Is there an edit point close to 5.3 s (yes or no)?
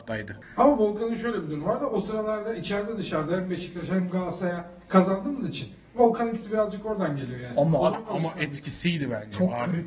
no